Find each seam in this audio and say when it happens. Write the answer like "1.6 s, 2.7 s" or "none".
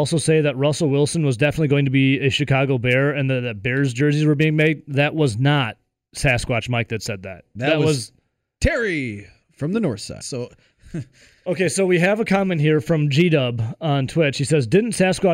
10.2 s